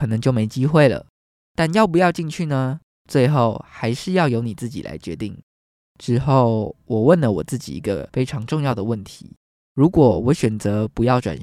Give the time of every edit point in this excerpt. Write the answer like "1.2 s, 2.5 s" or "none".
none